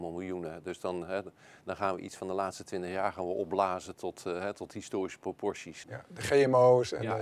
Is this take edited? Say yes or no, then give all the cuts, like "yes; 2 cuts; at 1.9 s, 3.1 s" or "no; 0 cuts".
yes; 1 cut; at 5.8 s